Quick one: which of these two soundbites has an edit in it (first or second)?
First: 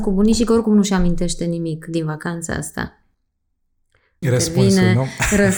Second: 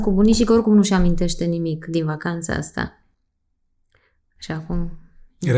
first